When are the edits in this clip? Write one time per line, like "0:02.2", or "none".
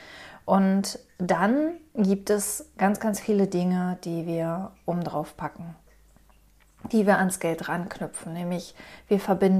none

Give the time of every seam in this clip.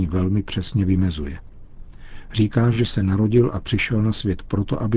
none

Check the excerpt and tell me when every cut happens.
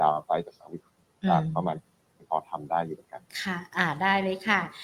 0:03.3

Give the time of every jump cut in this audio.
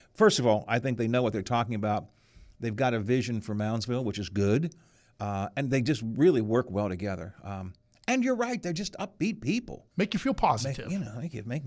0:09.9

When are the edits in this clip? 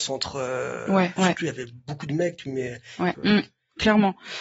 0:01.2
0:03.1

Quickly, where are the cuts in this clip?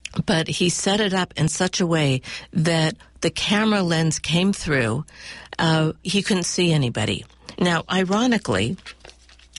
0:06.0
0:07.5

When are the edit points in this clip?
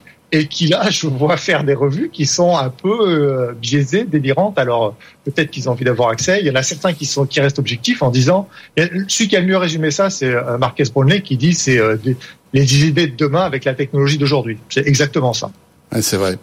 none

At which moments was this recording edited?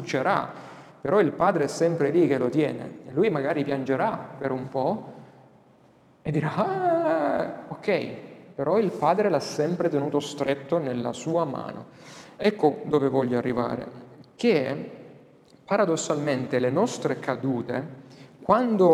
none

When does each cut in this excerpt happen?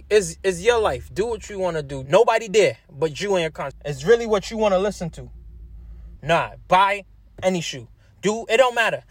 0:02.1
0:03.7
0:06.2

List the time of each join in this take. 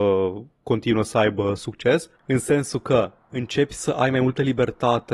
0:02.2

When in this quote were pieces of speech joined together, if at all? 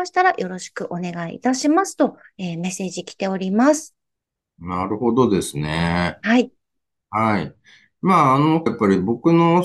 0:08.7

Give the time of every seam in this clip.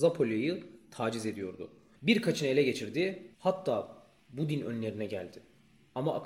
0:02.0
0:03.3

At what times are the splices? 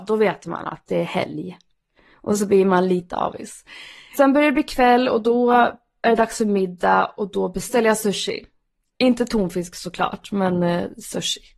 none

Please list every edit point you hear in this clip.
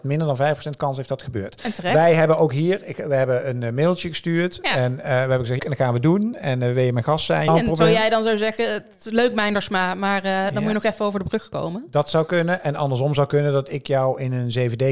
0:05.6
0:07.5

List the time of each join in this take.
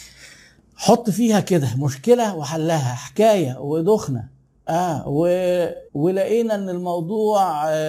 0:05.9

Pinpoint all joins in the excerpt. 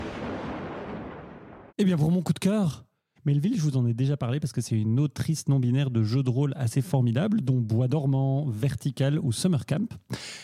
0:01.7
0:03.2

